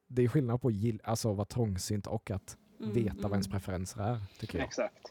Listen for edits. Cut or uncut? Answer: uncut